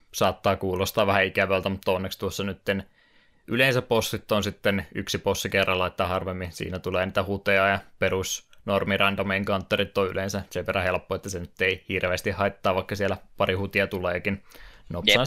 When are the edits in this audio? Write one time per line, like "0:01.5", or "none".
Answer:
none